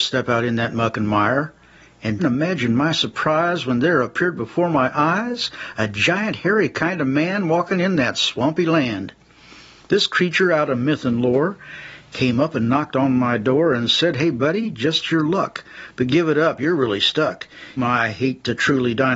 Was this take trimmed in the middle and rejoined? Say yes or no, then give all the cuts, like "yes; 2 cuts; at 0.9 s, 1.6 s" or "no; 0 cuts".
yes; 2 cuts; at 2.2 s, 17.8 s